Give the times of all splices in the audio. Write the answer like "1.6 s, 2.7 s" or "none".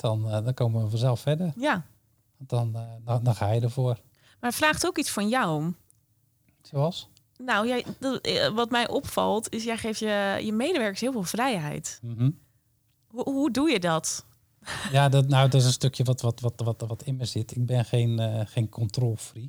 none